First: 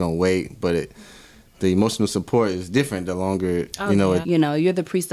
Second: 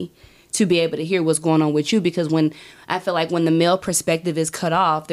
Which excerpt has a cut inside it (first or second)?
first